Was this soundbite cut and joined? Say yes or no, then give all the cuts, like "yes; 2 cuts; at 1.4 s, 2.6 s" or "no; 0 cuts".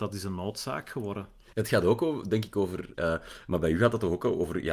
yes; 2 cuts; at 1.5 s, 2.9 s